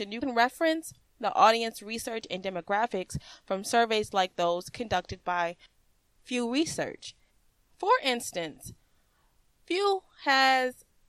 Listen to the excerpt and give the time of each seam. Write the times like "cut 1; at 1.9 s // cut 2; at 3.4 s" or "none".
none

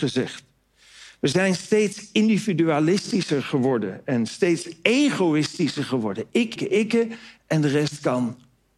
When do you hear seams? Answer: cut 1; at 6.6 s

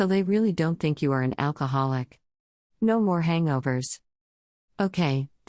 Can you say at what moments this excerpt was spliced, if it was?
cut 1; at 2.6 s

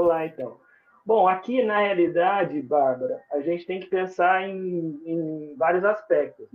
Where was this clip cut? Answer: none

